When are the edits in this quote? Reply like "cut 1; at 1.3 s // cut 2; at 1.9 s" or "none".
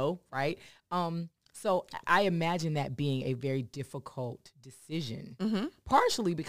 none